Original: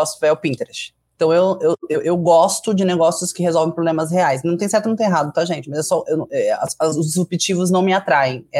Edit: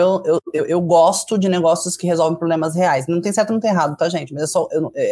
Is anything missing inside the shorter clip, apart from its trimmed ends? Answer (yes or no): no